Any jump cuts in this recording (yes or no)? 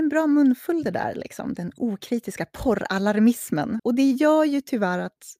yes